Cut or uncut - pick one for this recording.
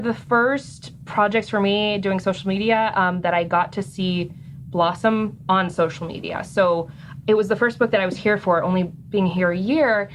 uncut